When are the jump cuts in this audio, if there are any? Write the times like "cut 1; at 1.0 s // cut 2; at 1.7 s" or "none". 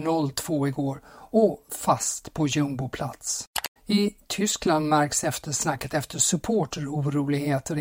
cut 1; at 3.8 s